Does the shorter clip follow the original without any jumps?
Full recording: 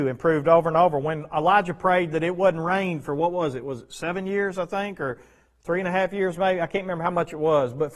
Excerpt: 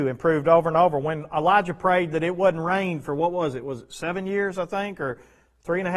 yes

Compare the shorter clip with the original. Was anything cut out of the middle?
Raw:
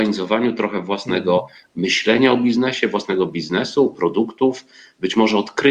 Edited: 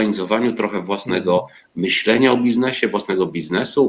no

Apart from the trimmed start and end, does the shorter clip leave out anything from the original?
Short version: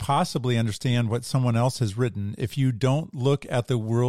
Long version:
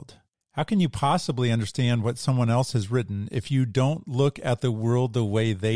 no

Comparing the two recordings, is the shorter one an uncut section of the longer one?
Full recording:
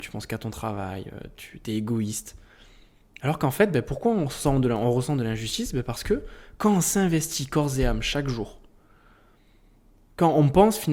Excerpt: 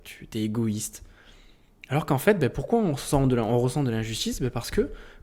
yes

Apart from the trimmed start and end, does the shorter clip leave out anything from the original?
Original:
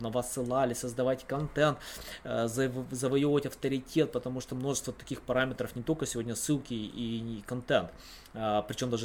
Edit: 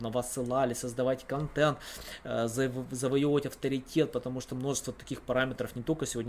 no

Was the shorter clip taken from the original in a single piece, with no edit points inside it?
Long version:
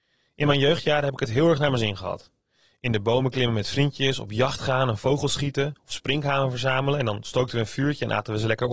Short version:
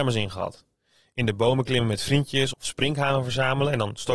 no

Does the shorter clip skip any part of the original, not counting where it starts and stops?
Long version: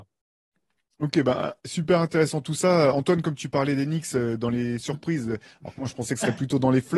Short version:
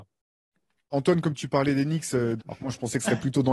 yes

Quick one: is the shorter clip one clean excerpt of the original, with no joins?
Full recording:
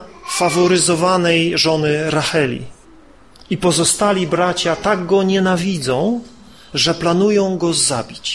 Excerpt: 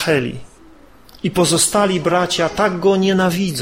yes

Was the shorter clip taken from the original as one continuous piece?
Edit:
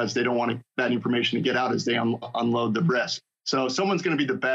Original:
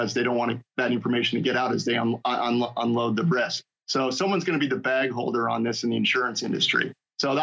no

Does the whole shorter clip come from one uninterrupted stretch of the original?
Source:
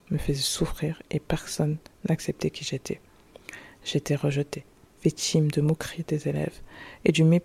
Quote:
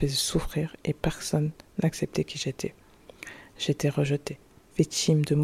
yes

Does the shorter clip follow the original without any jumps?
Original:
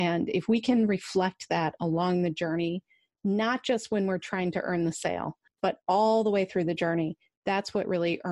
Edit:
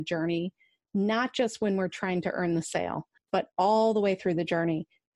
yes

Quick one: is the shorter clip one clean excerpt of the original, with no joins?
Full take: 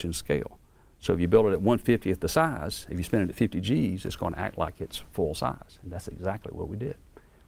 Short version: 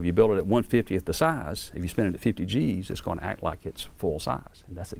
yes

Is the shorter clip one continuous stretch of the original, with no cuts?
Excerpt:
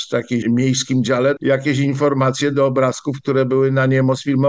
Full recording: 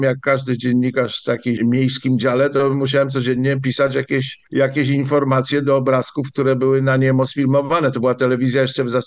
no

